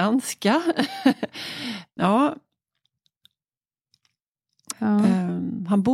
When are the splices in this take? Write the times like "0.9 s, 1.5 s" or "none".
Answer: 2.0 s, 4.7 s